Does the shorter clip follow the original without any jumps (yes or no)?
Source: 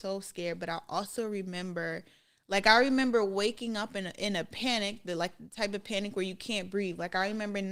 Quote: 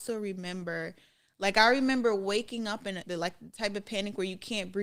no